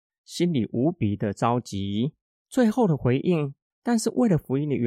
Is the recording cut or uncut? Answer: cut